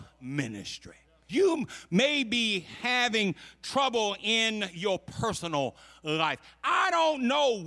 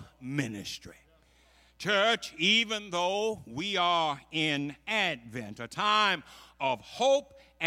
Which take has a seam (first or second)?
first